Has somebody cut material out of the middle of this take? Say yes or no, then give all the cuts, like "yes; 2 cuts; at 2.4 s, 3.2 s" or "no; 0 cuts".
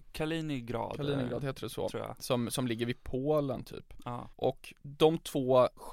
no; 0 cuts